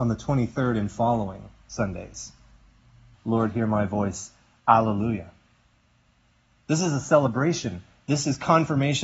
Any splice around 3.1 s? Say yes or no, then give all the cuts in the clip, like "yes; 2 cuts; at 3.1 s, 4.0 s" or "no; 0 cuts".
yes; 1 cut; at 3.1 s